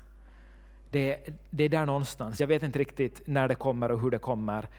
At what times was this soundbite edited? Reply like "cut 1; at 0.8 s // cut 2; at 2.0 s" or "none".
none

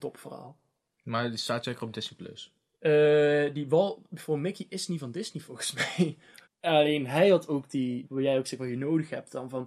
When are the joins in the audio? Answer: cut 1; at 6.4 s // cut 2; at 8.0 s

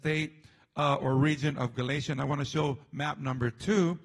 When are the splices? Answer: none

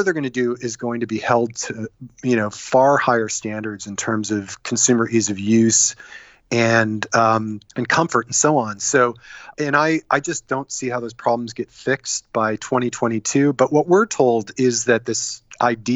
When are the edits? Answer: cut 1; at 7.7 s // cut 2; at 9.5 s

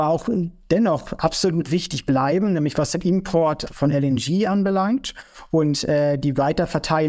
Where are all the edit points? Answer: none

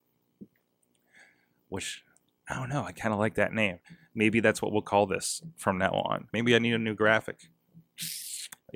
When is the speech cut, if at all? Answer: cut 1; at 6.3 s

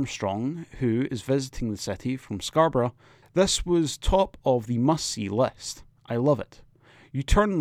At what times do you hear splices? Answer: cut 1; at 3.2 s

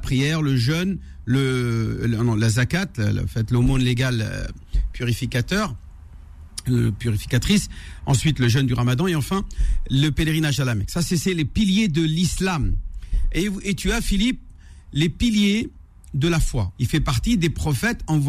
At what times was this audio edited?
cut 1; at 16.8 s

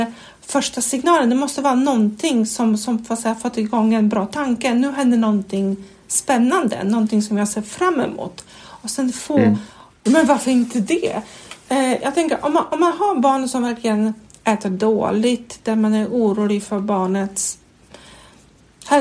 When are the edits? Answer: cut 1; at 10.1 s

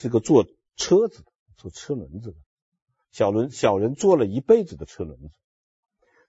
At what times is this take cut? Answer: none

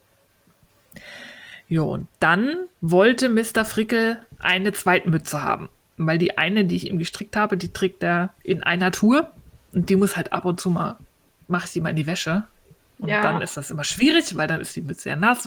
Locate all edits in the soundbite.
cut 1; at 2.7 s

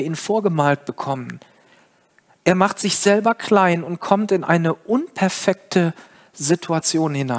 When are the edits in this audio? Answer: none

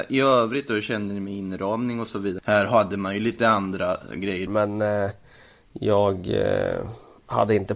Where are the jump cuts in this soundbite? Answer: cut 1; at 2.4 s // cut 2; at 4.5 s

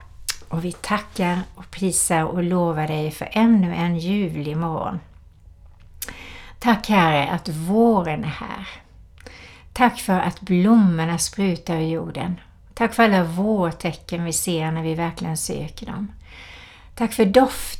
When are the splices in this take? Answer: none

